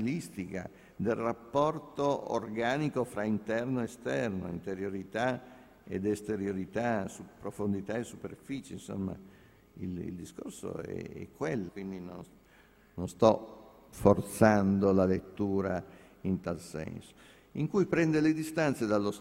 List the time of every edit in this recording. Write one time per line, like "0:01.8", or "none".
0:11.7

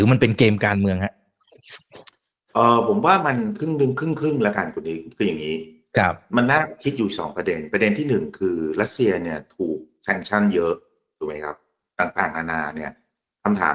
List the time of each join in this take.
none

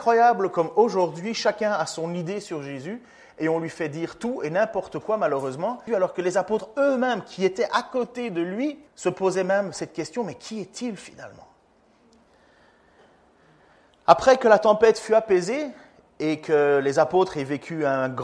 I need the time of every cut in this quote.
0:05.9
0:08.9

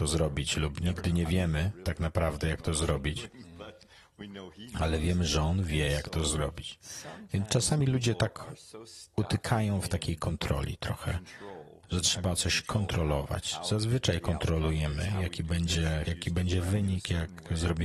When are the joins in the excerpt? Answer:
0:16.1

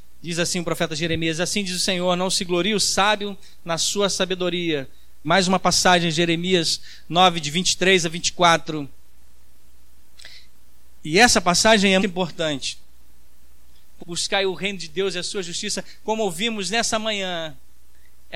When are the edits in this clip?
0:05.2
0:12.0
0:14.0

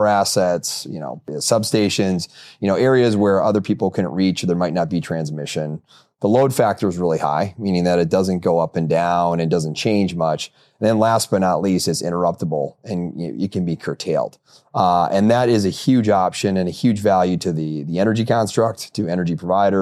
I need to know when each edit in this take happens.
none

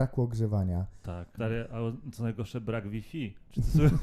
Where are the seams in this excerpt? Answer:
0:01.4

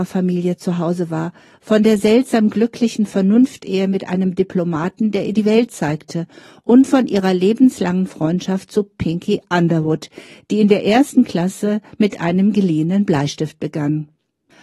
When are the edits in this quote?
none

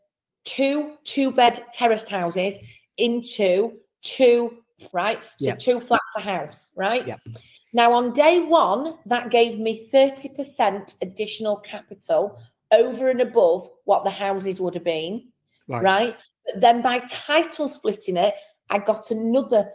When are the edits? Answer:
0:04.9

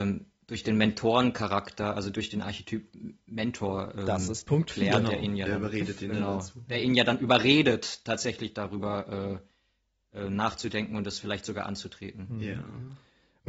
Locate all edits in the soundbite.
none

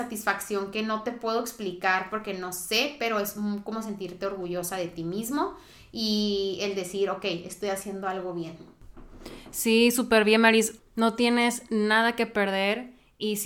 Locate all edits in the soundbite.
0:10.8

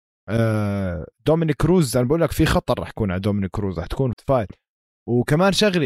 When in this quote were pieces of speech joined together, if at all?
0:04.1

